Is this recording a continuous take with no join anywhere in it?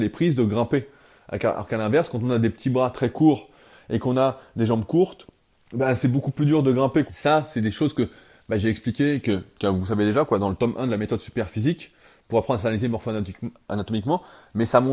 no; 1 cut; at 7.1 s

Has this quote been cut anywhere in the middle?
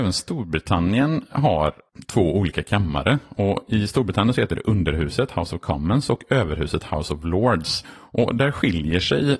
yes; 1 cut; at 7.8 s

